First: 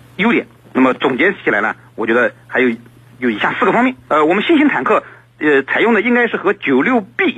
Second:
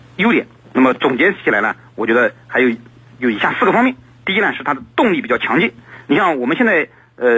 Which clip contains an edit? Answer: first; 1 cut; at 4.1 s

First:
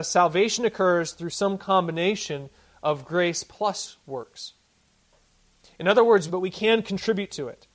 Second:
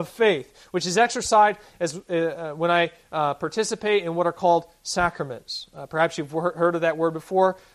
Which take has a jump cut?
first; 1 cut; at 6.3 s

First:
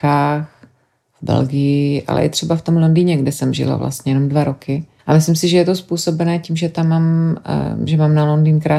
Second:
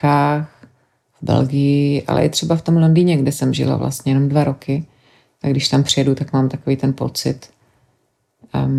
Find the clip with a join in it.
first; 1 cut; at 5.0 s

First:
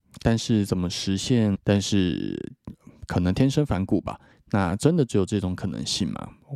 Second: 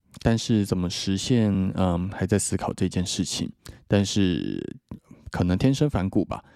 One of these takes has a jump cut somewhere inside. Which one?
first; 2 cuts; at 1.5 s, 4.3 s

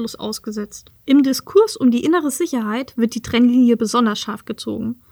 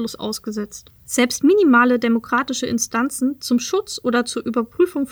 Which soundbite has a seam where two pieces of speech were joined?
first; 1 cut; at 1.0 s

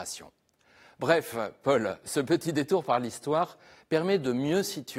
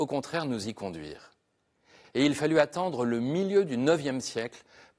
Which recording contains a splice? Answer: second; 1 cut; at 2.0 s

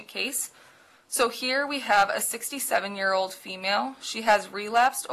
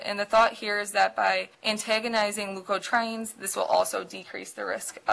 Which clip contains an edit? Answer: second; 1 cut; at 1.5 s

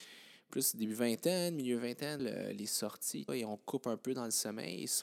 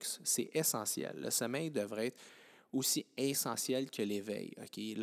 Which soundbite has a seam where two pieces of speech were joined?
first; 2 cuts; at 2.2 s, 3.3 s

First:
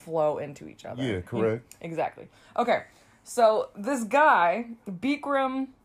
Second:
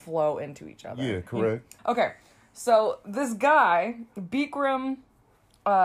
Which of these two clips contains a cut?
second; 1 cut; at 1.8 s

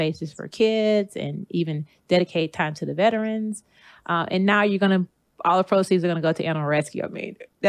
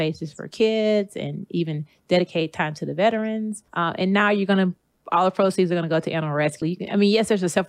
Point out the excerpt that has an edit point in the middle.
second; 2 cuts; at 3.7 s, 6.6 s

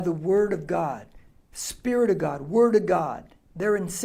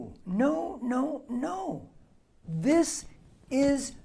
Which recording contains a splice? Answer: second; 1 cut; at 2.4 s

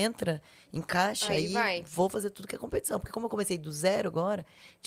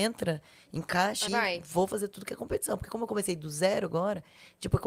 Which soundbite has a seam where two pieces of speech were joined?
second; 1 cut; at 1.3 s

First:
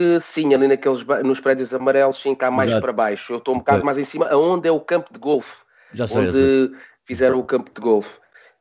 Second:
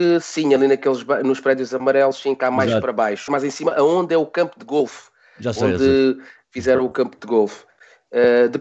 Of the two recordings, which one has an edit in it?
second; 1 cut; at 3.3 s

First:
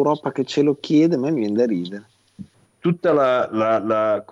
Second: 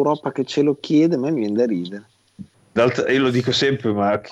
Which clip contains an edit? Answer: first; 1 cut; at 2.6 s

